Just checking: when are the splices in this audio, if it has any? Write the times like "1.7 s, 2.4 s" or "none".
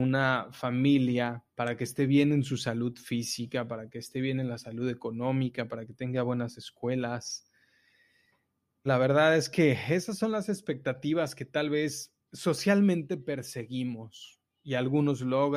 1.5 s, 8.9 s, 12.2 s